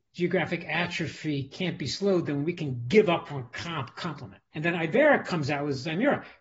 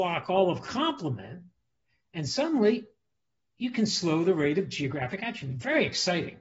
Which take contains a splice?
first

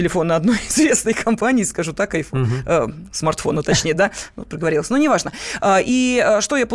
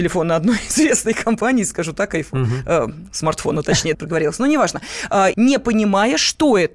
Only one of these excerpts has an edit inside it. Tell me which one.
second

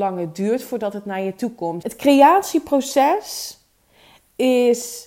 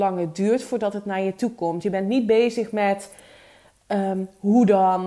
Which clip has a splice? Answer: first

